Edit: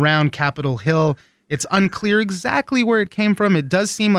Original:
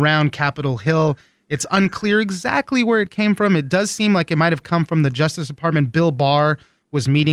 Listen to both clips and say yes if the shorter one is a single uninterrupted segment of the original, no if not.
yes